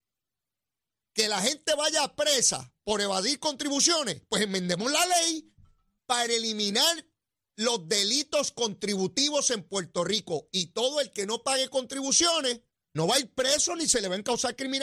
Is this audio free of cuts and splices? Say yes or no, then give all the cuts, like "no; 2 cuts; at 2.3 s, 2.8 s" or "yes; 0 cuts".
no; 2 cuts; at 6.0 s, 12.9 s